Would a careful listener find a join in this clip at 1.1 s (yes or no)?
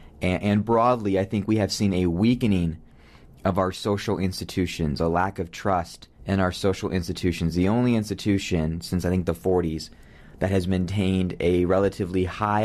no